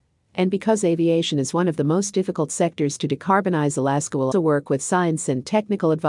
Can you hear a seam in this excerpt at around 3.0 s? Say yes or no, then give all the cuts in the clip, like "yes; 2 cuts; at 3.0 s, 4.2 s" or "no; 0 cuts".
no; 1 cut; at 4.3 s